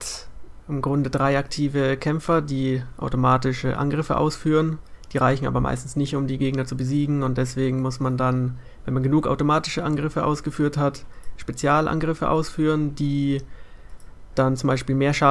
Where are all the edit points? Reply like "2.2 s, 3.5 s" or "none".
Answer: none